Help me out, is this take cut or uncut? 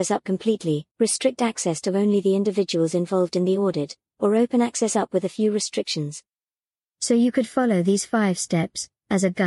cut